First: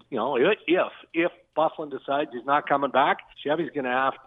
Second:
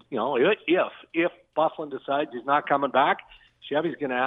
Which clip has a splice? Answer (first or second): first